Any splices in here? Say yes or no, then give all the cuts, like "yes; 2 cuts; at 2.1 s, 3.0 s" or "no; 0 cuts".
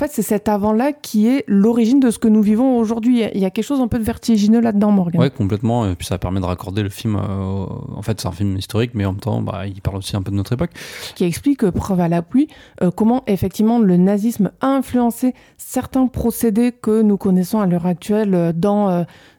yes; 1 cut; at 11.2 s